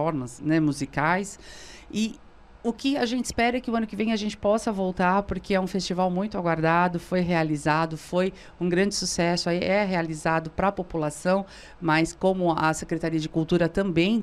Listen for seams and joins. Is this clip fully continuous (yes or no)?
yes